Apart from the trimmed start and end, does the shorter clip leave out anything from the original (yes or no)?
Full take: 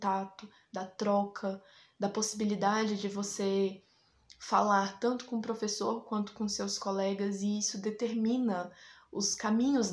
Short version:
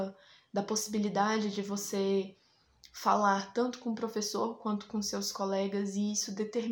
no